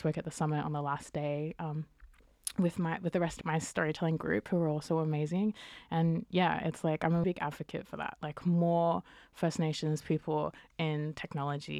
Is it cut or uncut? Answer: cut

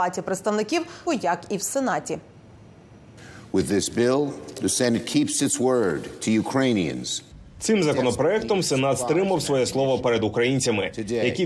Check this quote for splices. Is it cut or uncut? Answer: cut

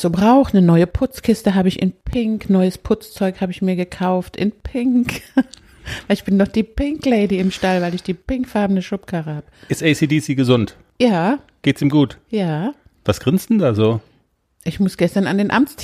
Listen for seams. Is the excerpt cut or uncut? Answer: uncut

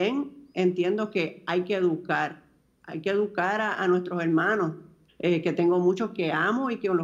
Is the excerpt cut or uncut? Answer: cut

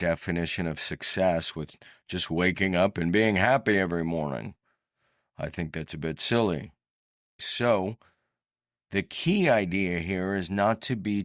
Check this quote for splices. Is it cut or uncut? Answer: cut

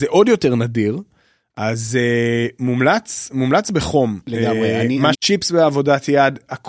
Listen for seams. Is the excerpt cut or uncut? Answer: cut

